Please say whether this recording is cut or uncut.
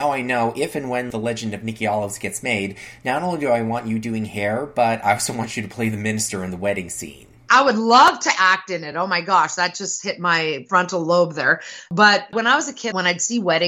uncut